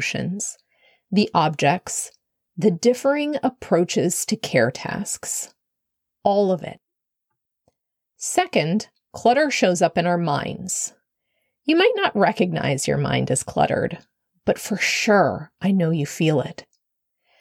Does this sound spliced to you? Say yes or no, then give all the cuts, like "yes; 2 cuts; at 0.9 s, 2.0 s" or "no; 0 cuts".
no; 0 cuts